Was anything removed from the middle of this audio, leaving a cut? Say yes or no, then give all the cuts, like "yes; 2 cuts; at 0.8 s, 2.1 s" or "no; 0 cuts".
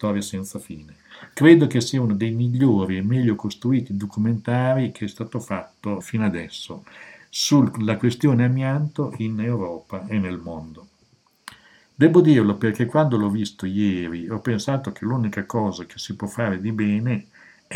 yes; 1 cut; at 6.0 s